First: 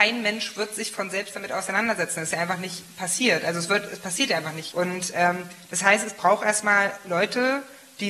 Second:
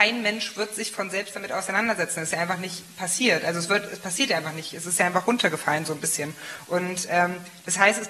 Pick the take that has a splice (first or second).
first